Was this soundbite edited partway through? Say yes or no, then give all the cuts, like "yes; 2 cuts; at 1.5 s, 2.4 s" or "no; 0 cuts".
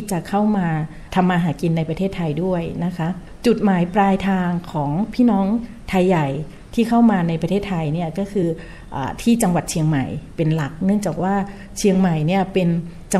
no; 0 cuts